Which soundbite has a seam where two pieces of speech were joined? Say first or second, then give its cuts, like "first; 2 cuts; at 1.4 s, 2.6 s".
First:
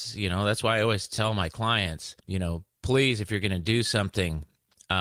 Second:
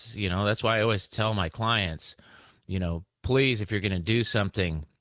first; 1 cut; at 2.2 s